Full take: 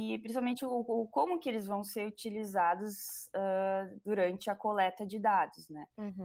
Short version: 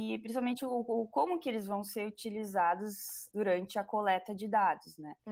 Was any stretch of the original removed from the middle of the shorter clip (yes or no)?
yes